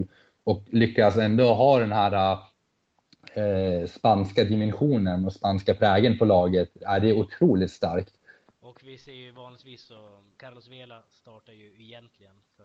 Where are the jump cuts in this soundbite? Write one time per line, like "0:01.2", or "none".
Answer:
0:08.5
0:10.4

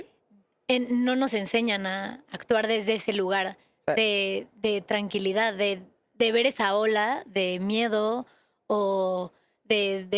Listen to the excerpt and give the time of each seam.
none

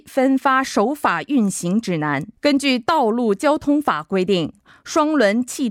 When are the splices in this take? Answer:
0:02.4

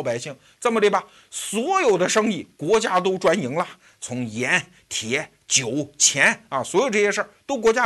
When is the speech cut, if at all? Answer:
none

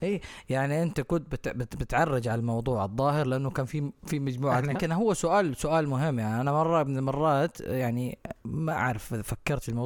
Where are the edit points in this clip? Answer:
0:04.8

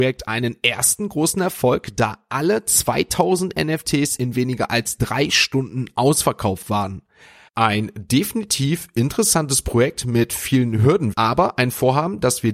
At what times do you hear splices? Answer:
0:07.5
0:11.1

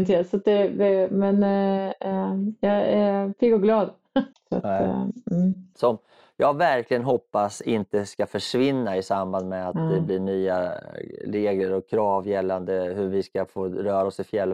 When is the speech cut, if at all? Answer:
0:04.3
0:05.7

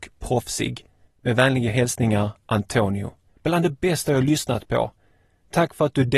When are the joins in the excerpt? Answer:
0:01.1
0:03.3

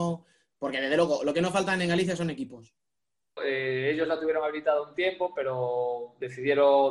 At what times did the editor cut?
0:03.4

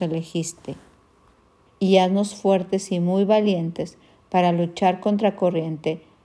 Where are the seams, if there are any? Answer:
0:01.7

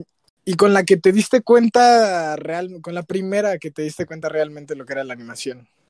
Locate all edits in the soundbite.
none

